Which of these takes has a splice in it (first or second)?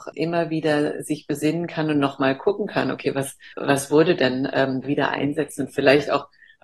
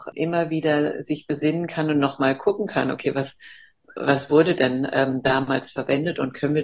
first